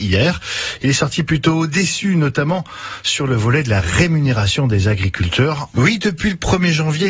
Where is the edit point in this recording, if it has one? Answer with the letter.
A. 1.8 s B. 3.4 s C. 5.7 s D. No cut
C